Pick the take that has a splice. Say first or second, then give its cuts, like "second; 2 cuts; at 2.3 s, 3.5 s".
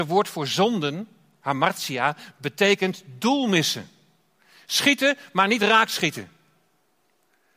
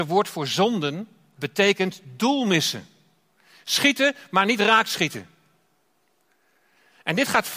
second; 1 cut; at 1.4 s